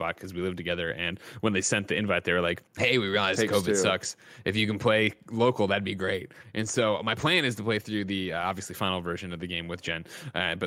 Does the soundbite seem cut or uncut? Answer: cut